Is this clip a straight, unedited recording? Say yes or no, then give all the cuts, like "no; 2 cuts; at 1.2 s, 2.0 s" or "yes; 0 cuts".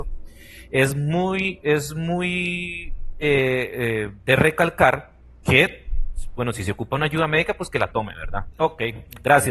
no; 1 cut; at 8.5 s